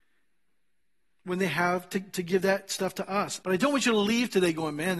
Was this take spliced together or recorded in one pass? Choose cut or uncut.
cut